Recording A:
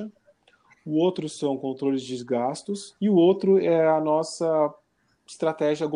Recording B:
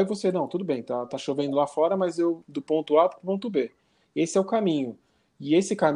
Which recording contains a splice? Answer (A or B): B